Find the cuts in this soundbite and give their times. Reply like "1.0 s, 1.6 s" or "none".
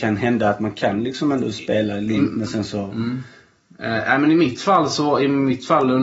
none